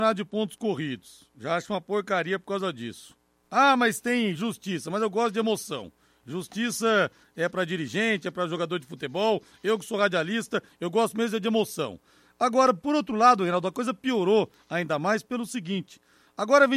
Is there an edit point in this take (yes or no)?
no